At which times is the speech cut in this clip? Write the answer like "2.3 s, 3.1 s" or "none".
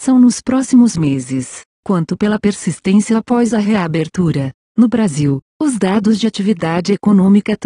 4.6 s